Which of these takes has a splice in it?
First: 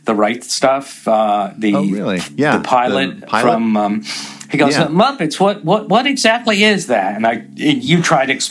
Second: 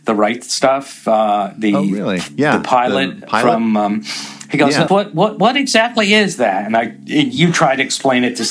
second; 1 cut; at 4.9 s

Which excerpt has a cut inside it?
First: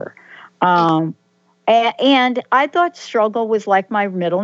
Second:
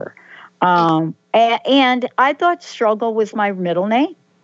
second; 2 cuts; at 1.2 s, 3.3 s

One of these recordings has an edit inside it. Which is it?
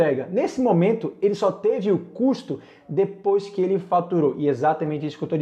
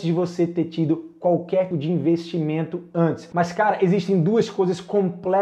second; 2 cuts; at 1.7 s, 3.3 s

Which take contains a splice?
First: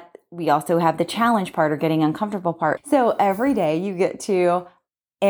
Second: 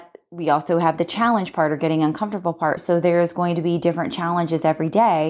first; 1 cut; at 2.8 s

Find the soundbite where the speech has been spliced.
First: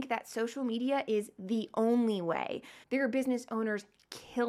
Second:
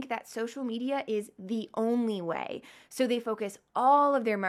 first; 1 cut; at 2.8 s

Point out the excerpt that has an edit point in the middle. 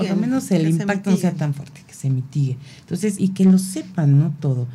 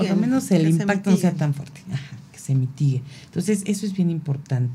first; 2 cuts; at 1.8 s, 3.2 s

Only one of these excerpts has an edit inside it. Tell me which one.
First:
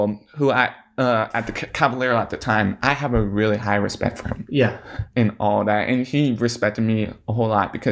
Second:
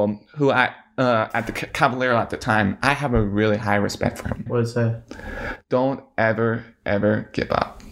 second; 1 cut; at 4.5 s

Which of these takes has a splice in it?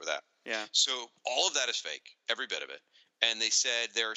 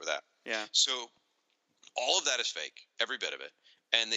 first; 1 cut; at 1.2 s

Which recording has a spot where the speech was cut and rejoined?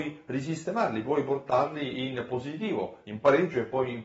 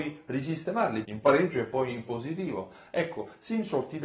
second; 1 cut; at 1.0 s

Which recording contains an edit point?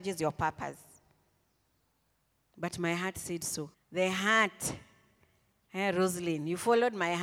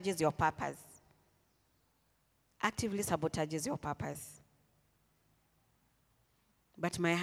first; 2 cuts; at 2.5 s, 3.7 s

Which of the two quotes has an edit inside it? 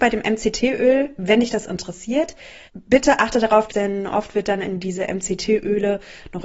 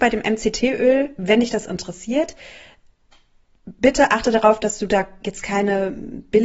first; 2 cuts; at 2.7 s, 3.7 s

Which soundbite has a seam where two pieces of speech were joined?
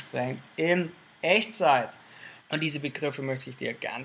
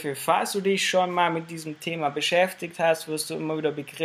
first; 1 cut; at 2.4 s

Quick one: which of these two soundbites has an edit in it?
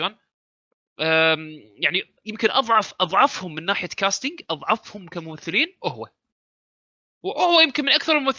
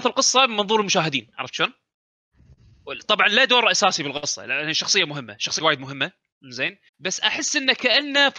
second; 2 cuts; at 5.6 s, 6.9 s

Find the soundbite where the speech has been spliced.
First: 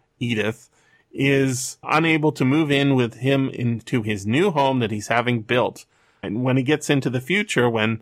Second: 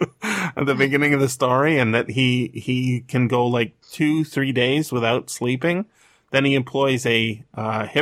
first; 2 cuts; at 1.8 s, 6.2 s

